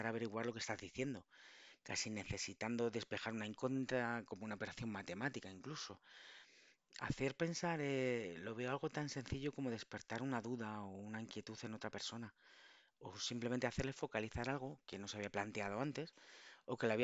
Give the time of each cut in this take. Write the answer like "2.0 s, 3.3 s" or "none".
none